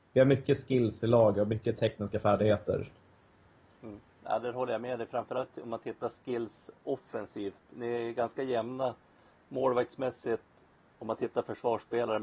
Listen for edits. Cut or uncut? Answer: uncut